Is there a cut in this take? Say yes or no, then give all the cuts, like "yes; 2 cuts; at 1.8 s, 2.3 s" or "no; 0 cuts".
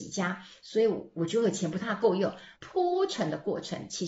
yes; 1 cut; at 2.6 s